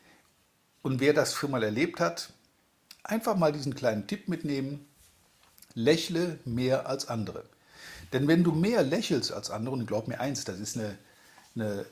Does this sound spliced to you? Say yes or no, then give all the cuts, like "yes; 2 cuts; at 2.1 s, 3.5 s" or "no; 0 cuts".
no; 0 cuts